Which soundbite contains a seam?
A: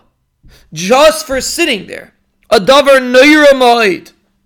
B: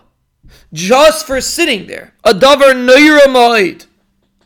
B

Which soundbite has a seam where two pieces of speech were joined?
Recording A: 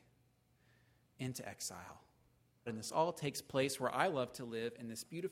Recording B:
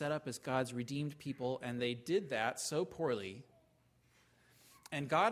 A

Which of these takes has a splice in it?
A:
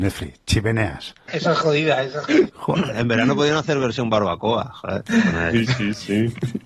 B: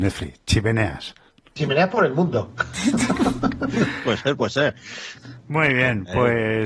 A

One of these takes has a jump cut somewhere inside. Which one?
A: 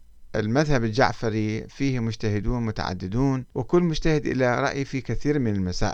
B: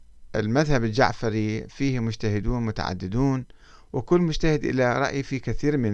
A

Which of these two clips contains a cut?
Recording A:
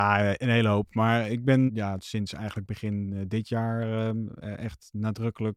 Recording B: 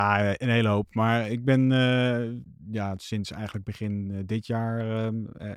A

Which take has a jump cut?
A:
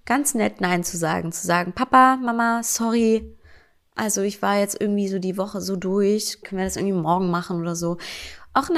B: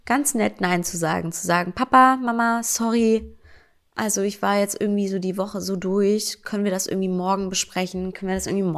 A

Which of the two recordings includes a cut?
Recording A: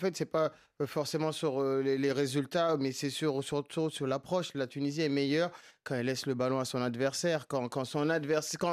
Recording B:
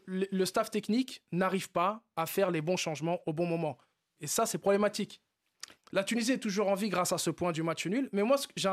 B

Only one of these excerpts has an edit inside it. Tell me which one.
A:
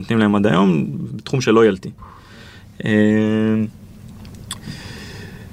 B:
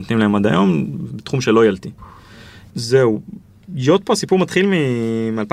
B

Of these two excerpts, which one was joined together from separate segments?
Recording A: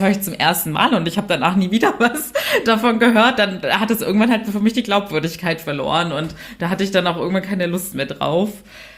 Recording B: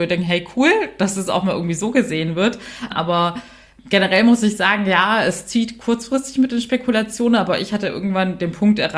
B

